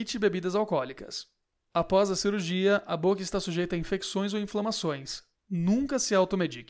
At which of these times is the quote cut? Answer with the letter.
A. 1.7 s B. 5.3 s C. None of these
B